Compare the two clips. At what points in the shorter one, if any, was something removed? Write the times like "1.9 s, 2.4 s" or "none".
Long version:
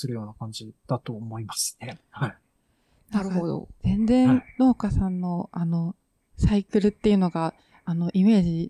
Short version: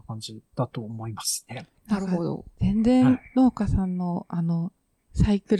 1.7 s